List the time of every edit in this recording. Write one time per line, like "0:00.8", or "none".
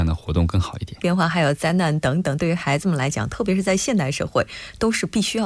0:01.0